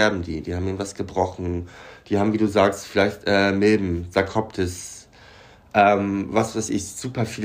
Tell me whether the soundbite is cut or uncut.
uncut